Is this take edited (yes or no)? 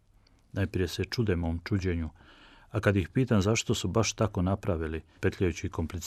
yes